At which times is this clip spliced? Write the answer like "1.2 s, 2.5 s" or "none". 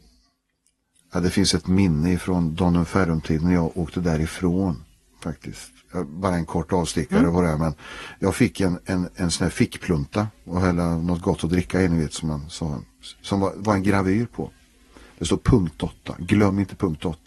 none